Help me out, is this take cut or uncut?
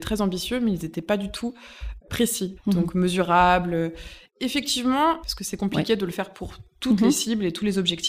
cut